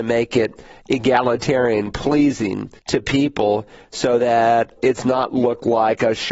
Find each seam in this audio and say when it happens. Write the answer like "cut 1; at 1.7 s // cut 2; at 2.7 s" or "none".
cut 1; at 2.8 s // cut 2; at 4.8 s